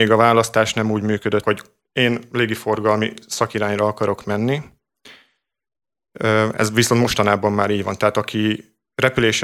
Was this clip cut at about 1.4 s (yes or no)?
yes